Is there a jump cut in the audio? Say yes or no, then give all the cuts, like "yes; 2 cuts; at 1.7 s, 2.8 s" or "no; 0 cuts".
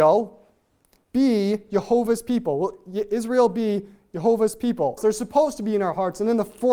yes; 1 cut; at 5.0 s